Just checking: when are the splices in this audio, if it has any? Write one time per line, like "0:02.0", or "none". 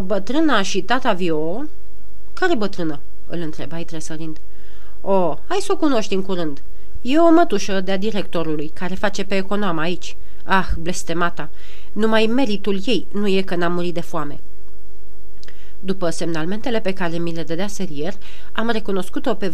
0:07.0